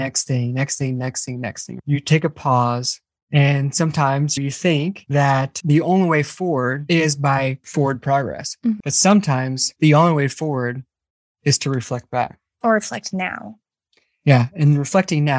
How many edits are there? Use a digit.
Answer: 1